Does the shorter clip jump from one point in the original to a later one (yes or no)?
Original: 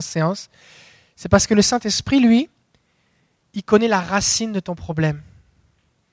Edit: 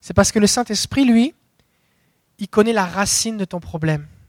no